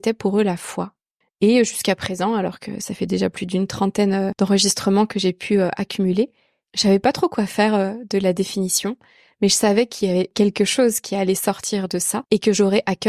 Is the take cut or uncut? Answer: uncut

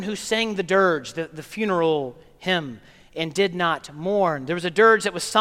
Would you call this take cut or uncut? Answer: uncut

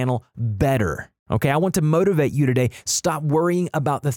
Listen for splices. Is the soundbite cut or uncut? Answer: cut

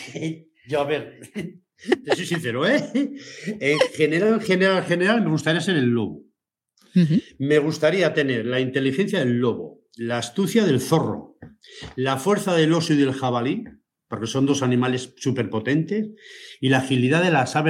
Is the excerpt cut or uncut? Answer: uncut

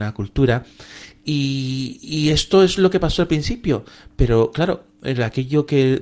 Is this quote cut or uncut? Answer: uncut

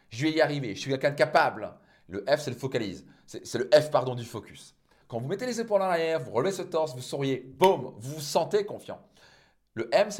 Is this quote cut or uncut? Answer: cut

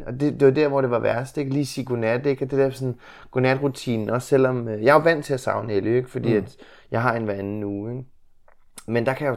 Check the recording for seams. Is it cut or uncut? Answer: uncut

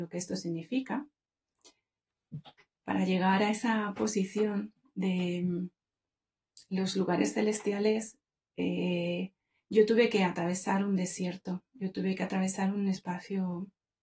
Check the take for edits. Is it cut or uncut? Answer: uncut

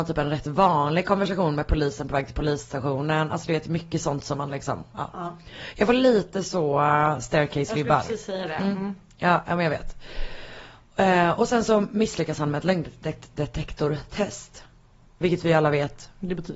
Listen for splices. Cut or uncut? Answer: uncut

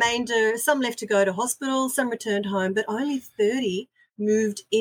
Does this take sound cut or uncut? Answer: uncut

